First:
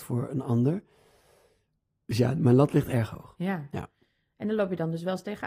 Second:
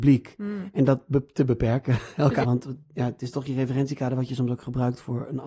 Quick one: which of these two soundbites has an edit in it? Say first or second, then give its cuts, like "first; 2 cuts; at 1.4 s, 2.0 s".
second; 1 cut; at 2.4 s